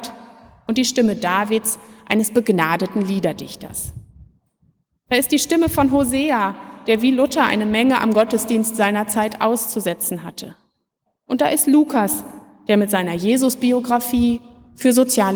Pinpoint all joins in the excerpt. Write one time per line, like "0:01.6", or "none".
0:06.9
0:11.1